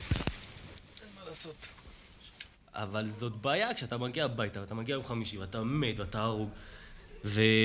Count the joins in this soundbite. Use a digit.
0